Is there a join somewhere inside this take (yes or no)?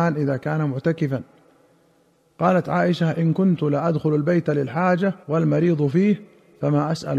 yes